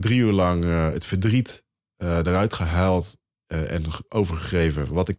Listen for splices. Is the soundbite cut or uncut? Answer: uncut